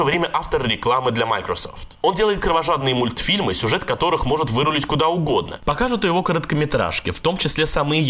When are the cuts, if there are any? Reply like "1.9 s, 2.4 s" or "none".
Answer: 5.6 s